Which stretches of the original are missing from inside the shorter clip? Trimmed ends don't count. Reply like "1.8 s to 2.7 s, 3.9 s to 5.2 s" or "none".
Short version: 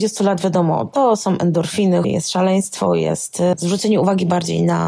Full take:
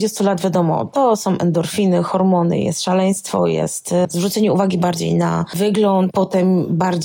2.0 s to 2.6 s